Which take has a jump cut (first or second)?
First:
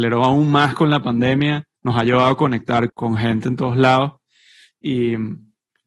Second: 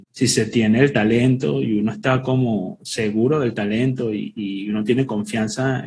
first